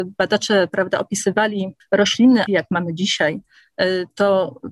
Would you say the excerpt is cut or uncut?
cut